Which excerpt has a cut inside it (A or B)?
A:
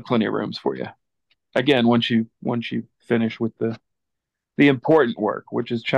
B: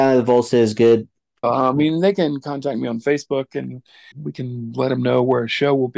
B